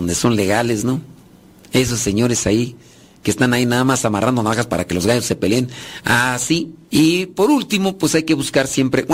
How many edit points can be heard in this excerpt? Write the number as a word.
one